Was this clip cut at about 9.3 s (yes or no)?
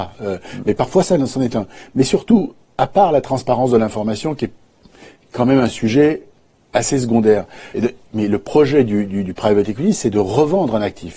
no